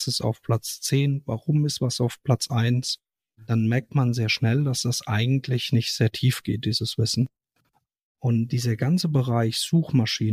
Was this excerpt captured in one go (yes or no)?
yes